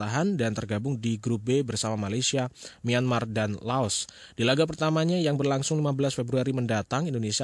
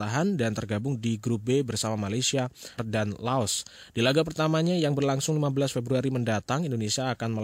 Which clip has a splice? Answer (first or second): second